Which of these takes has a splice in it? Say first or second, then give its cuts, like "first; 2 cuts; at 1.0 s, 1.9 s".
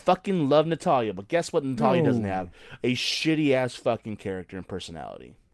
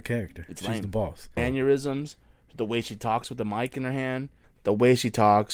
second; 2 cuts; at 1.4 s, 4.4 s